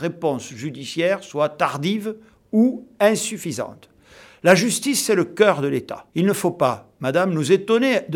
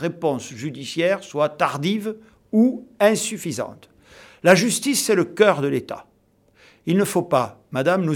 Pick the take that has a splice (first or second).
first